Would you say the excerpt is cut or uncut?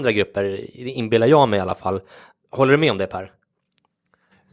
uncut